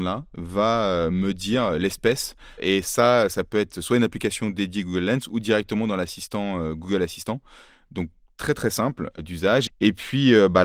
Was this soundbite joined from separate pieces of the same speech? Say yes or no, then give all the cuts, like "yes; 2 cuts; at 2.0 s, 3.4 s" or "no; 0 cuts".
yes; 1 cut; at 9.7 s